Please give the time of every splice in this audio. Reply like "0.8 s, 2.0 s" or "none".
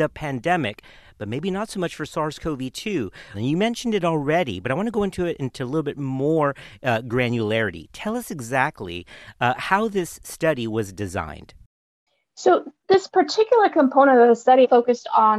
none